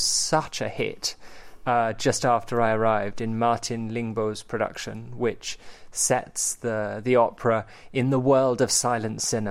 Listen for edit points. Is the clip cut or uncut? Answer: uncut